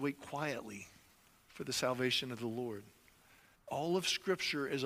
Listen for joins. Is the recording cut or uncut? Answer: cut